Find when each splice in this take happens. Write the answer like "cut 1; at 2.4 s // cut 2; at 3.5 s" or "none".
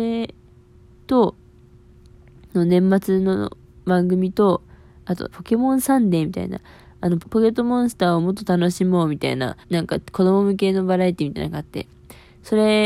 cut 1; at 5.3 s // cut 2; at 7.2 s // cut 3; at 9.6 s